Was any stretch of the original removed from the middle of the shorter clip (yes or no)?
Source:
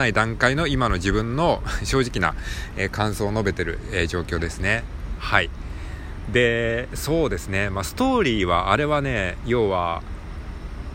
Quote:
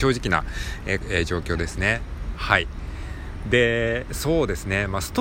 yes